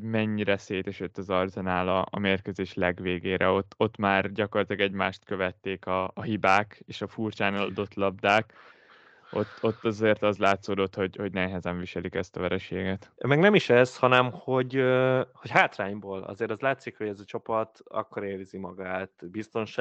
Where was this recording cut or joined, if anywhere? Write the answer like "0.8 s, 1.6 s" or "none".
13.2 s